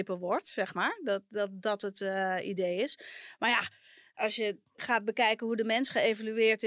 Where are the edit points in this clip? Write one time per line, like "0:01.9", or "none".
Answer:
none